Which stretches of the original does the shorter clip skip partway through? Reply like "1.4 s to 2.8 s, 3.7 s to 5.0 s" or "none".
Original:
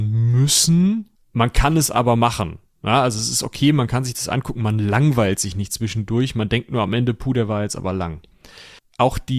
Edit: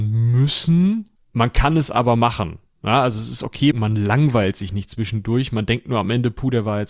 3.7 s to 4.5 s